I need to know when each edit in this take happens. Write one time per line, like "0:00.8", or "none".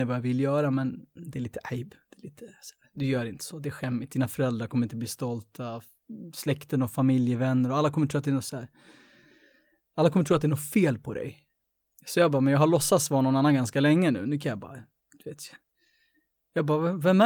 none